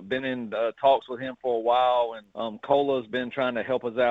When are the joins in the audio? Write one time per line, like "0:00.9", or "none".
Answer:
0:02.3